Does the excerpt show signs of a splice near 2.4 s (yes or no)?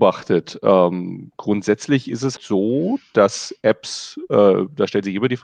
yes